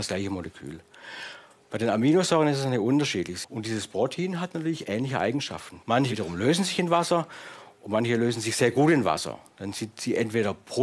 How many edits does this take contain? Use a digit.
2